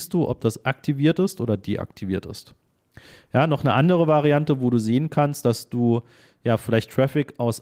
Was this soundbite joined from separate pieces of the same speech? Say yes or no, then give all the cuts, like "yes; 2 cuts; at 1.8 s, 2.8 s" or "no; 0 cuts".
no; 0 cuts